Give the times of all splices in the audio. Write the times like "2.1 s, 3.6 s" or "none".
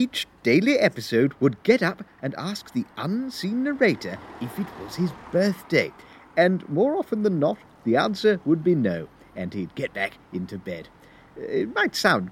2.2 s